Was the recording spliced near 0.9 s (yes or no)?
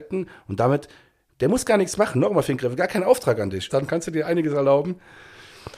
no